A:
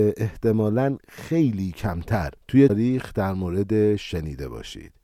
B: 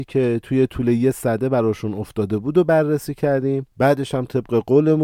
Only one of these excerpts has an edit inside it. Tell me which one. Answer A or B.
A